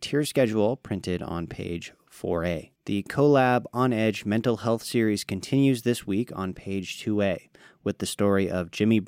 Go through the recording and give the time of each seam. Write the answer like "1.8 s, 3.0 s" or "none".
2.8 s